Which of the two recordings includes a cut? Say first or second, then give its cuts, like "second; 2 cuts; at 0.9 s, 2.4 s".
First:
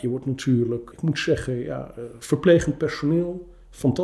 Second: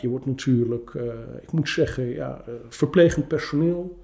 first; 1 cut; at 0.9 s